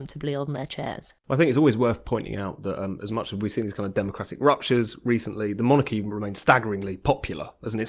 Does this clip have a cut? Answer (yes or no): no